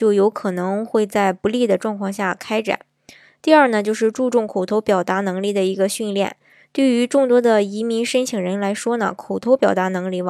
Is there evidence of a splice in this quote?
no; 0 cuts

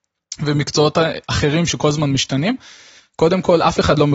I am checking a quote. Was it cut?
yes; 1 cut; at 3.0 s

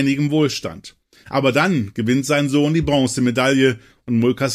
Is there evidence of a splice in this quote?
no; 0 cuts

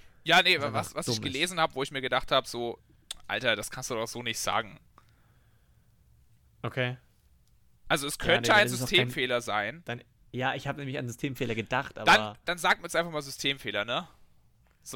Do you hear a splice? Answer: no; 0 cuts

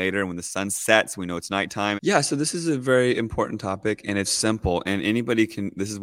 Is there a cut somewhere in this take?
yes; 2 cuts; at 2.0 s, 4.2 s

